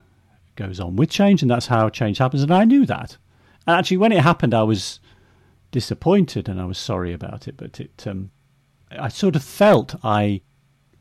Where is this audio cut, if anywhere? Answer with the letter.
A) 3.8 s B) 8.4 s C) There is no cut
C